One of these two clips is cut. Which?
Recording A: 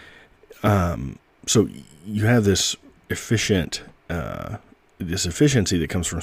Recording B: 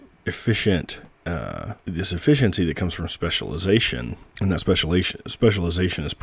B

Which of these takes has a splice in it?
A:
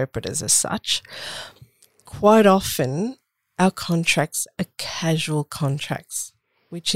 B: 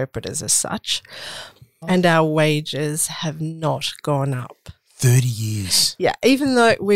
B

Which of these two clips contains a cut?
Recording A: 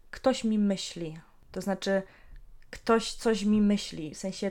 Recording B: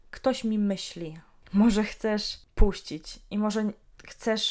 B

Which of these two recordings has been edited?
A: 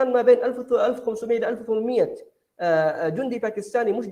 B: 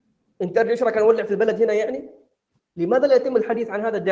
B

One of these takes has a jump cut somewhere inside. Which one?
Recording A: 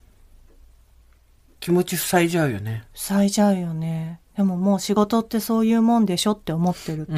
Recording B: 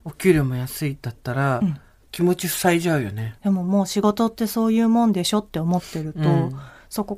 B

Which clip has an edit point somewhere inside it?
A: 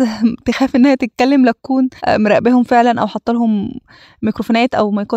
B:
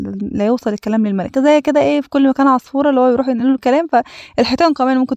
A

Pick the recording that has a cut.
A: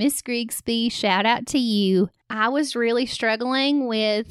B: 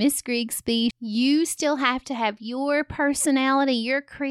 B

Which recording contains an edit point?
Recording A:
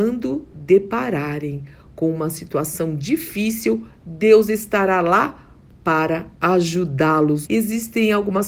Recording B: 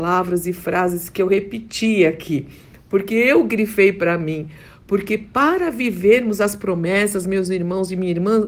A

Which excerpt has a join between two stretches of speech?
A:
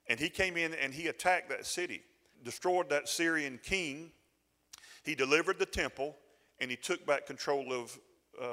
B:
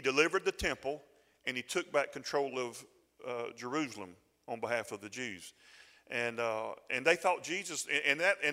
A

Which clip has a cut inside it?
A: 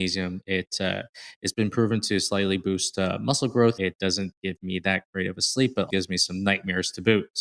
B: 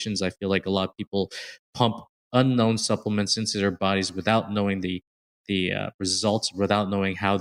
A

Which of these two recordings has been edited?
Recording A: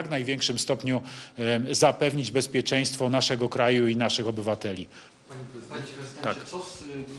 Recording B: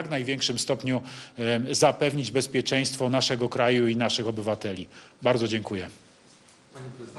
A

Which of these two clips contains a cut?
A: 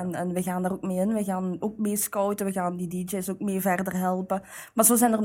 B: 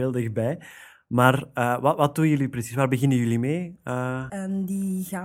B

